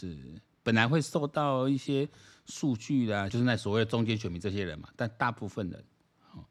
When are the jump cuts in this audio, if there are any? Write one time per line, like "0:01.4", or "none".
0:03.3